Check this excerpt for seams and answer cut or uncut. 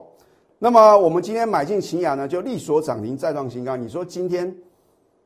uncut